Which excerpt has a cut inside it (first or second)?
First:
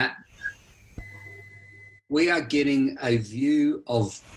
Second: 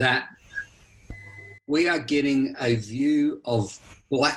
second